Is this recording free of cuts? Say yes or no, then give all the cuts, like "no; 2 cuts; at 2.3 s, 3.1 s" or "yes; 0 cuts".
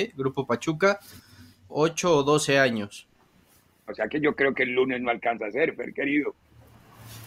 no; 2 cuts; at 1.7 s, 3.9 s